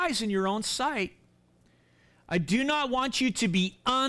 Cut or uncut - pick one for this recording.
uncut